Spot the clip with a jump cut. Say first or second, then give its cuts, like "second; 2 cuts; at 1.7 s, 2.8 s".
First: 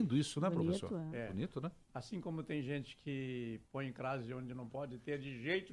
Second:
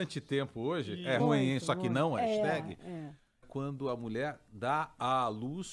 second; 2 cuts; at 1.2 s, 3.4 s